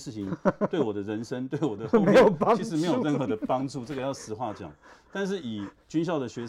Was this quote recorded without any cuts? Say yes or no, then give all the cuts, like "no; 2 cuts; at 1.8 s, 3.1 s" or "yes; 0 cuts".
yes; 0 cuts